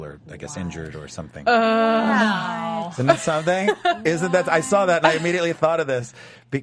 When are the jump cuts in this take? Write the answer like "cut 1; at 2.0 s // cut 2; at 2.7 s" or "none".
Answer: none